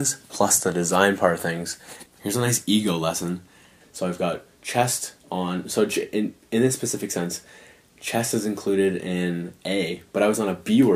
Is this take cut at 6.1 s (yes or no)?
no